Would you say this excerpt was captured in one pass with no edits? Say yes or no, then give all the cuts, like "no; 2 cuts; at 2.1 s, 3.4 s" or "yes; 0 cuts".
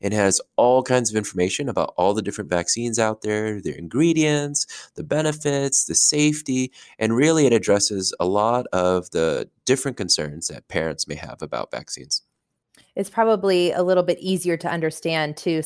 yes; 0 cuts